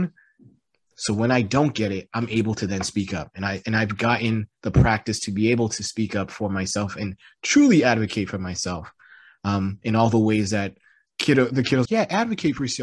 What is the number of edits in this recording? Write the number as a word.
one